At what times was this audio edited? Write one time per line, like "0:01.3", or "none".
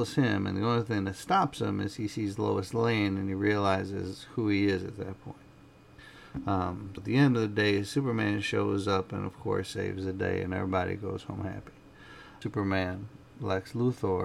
0:07.0
0:12.4